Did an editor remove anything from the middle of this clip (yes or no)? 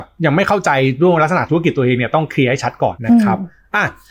yes